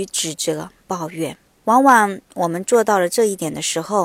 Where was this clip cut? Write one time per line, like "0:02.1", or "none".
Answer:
0:01.6